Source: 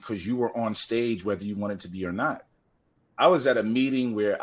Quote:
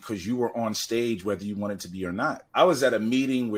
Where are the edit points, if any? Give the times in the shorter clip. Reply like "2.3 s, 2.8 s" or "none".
2.5 s